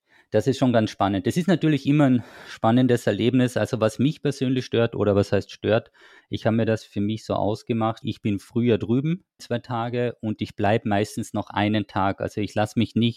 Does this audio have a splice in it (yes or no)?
yes